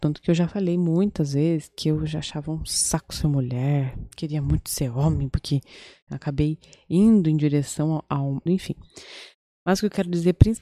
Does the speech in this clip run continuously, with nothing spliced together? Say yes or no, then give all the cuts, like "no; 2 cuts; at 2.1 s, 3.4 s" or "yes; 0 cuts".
no; 2 cuts; at 6.1 s, 8.5 s